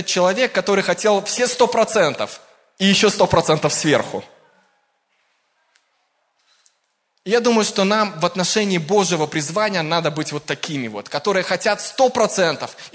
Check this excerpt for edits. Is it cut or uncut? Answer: uncut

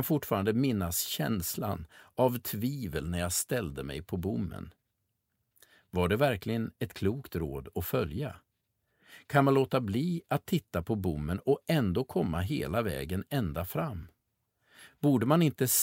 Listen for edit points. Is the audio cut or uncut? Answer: uncut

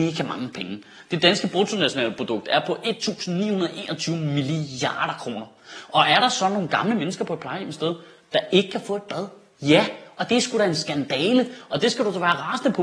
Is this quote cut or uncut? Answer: uncut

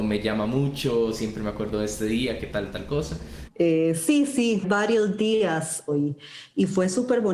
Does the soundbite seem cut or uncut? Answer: cut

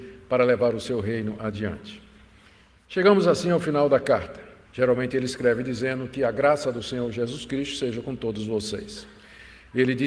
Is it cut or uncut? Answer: cut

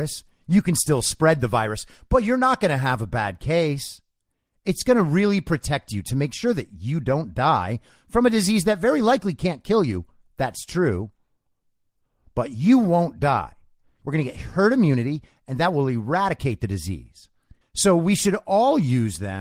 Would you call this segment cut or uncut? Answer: cut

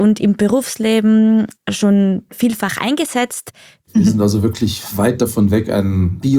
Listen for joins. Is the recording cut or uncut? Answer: cut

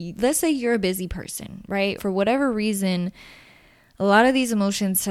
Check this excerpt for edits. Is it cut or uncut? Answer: cut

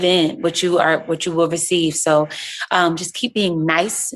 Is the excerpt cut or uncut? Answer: uncut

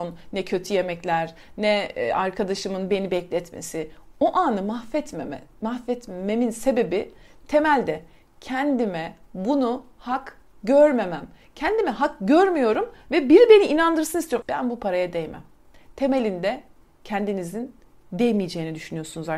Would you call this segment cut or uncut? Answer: cut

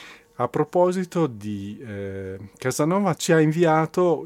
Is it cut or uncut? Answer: cut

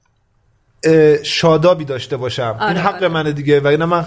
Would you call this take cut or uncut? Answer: uncut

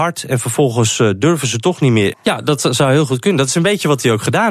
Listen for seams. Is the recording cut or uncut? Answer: cut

